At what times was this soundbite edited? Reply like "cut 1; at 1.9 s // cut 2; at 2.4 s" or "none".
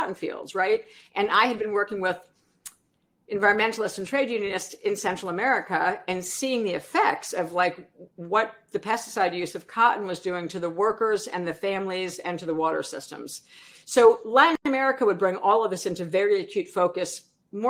cut 1; at 1.1 s